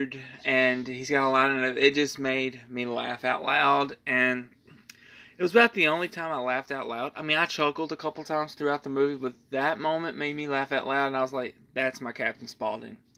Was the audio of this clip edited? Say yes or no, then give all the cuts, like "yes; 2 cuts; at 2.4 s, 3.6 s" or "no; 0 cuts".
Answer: no; 0 cuts